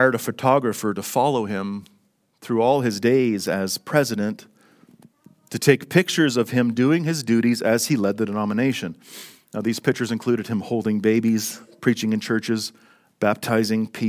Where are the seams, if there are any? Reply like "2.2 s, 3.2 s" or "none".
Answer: none